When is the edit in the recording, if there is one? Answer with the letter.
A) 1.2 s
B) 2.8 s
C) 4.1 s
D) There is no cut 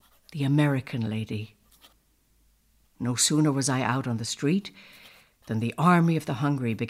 B